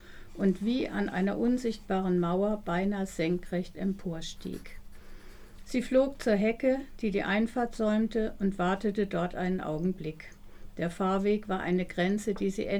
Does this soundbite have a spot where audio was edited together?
yes; 1 cut; at 5.6 s

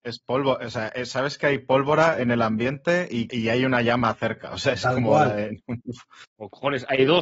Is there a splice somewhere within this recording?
yes; 1 cut; at 3.3 s

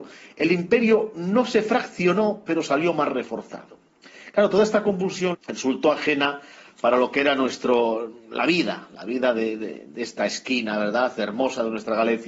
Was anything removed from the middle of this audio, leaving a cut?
yes; 1 cut; at 5.3 s

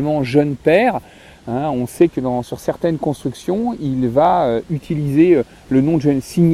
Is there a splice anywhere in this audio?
no; 0 cuts

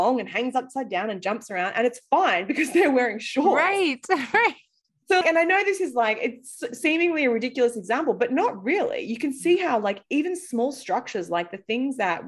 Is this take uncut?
no; 1 cut; at 5.2 s

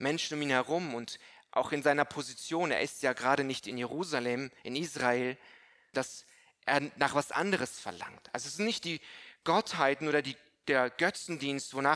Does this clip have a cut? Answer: yes; 1 cut; at 5.9 s

